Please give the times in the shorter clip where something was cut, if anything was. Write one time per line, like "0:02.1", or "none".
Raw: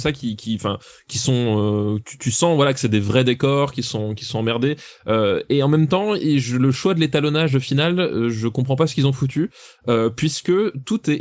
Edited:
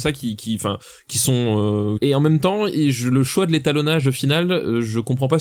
0:02.0